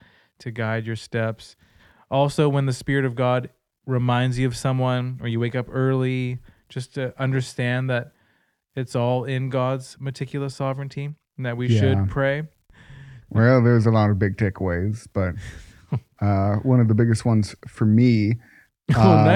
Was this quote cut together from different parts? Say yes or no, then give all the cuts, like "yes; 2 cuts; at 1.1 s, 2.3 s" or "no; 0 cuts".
yes; 1 cut; at 13.2 s